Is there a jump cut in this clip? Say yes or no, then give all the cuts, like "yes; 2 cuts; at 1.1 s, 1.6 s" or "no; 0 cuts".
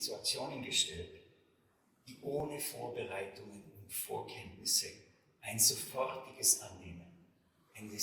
no; 0 cuts